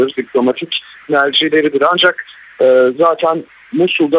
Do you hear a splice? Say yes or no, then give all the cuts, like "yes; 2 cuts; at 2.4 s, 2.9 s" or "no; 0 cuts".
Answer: no; 0 cuts